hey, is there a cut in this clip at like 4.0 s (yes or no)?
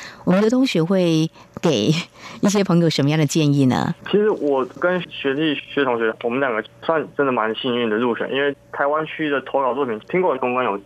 yes